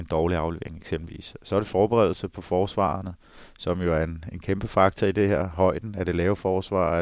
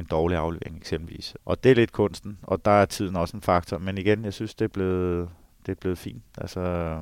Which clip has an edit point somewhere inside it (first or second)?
second